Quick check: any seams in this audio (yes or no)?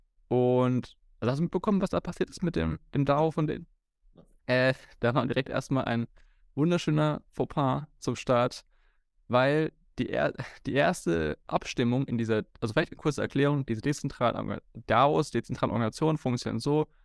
no